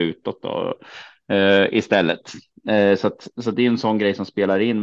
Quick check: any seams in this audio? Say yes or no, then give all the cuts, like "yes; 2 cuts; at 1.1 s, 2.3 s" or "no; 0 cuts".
no; 0 cuts